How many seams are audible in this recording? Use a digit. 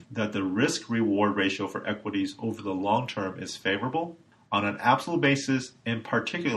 0